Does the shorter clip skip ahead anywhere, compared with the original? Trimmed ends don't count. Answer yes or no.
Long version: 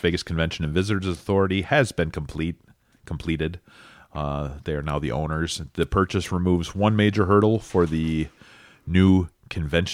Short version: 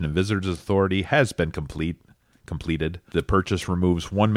yes